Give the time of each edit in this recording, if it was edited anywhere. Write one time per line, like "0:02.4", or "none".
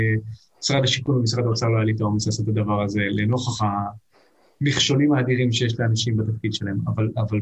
none